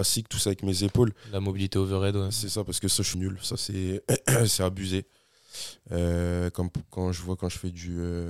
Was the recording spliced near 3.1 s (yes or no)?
yes